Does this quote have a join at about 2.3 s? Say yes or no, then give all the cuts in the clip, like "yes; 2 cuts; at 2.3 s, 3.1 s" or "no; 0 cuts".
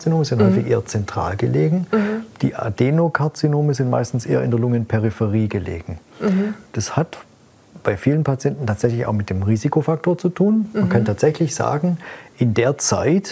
no; 0 cuts